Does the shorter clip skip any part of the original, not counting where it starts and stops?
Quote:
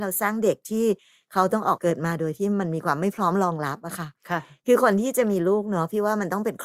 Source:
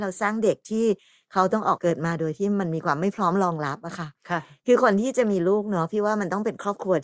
no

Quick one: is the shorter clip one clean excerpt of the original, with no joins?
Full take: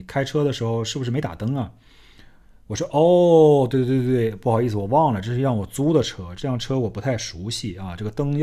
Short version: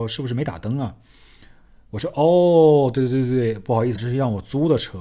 no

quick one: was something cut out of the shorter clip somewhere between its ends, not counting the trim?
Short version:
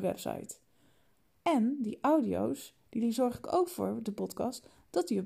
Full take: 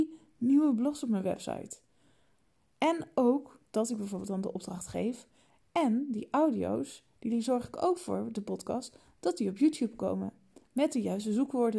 yes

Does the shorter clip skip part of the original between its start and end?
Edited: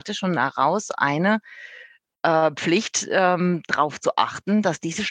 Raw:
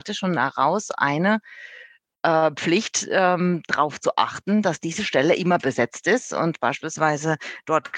no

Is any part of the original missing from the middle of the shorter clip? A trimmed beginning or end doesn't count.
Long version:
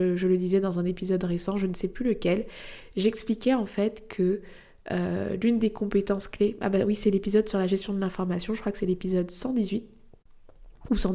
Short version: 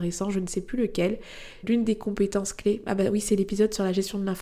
yes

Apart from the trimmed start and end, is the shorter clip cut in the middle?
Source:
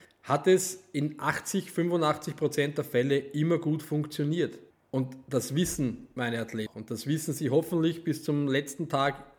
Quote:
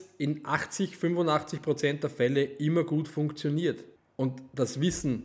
no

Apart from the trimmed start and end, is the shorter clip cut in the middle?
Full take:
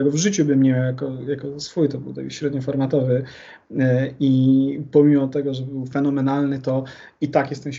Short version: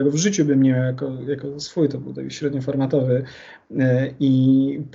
no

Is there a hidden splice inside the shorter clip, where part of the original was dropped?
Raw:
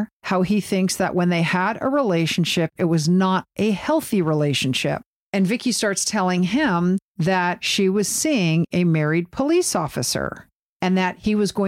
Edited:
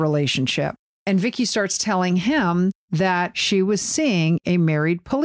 no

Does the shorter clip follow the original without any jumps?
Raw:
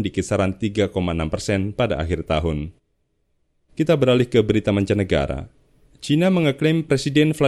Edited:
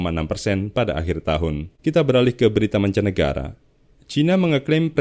no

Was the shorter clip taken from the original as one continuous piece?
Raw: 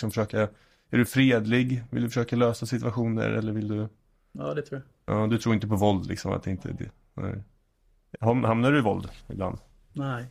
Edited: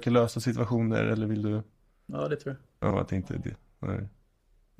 no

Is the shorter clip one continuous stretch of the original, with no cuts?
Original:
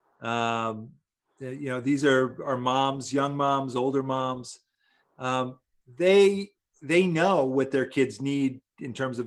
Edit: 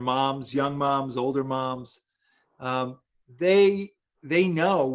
yes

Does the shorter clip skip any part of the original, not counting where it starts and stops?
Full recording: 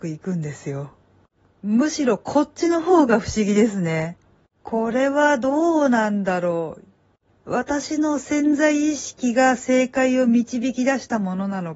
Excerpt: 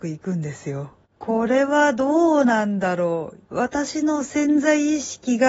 yes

